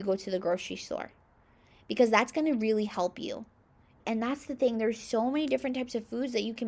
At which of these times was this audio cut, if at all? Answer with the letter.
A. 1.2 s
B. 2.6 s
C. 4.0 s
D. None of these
C